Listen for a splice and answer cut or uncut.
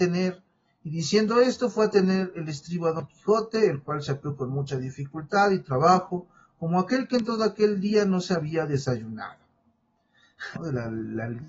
cut